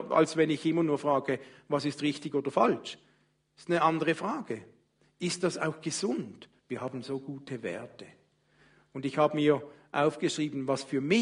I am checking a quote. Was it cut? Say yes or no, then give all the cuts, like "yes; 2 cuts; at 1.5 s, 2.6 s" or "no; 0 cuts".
yes; 1 cut; at 6.6 s